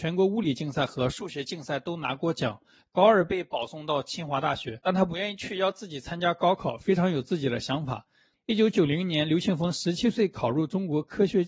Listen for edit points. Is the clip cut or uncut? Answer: cut